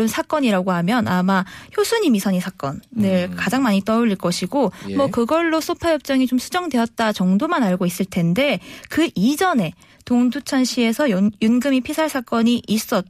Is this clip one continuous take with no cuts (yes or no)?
yes